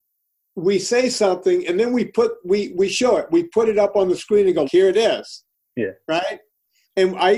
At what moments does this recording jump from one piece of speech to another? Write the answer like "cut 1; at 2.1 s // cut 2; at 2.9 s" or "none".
cut 1; at 4.6 s